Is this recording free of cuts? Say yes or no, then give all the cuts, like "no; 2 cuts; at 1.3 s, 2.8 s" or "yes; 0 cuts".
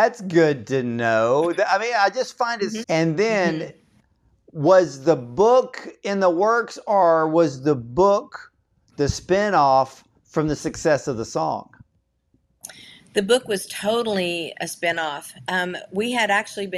no; 1 cut; at 2.8 s